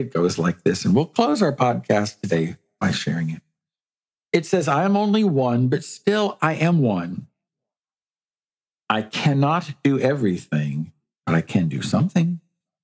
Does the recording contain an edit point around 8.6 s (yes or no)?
no